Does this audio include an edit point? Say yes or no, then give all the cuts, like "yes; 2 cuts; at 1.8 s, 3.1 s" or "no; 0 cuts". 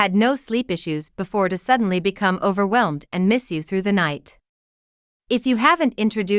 no; 0 cuts